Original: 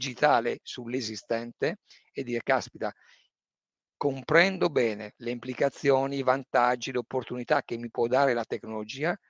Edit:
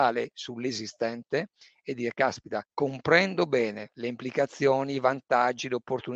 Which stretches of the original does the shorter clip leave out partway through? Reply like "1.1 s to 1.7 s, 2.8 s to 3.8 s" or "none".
2.9 s to 3.9 s